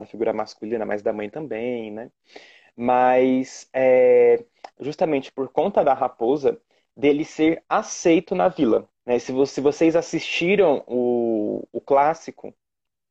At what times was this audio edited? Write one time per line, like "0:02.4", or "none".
0:04.7
0:09.0